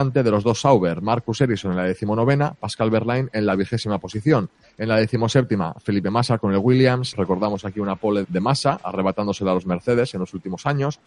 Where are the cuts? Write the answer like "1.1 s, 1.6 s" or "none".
4.6 s, 7.1 s, 8.2 s